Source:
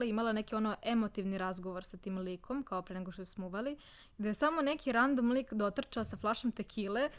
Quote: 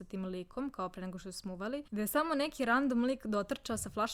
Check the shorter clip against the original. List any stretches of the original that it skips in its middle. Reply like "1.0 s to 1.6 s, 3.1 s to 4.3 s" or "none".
3.8 s to 4.1 s